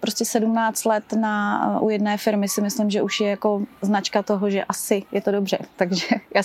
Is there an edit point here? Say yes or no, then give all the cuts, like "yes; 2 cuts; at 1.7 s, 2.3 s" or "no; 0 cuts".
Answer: no; 0 cuts